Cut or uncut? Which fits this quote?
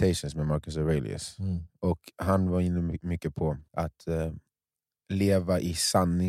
cut